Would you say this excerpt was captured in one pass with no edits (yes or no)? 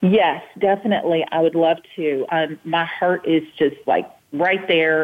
no